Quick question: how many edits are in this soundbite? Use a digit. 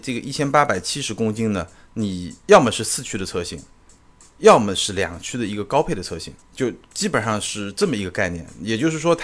2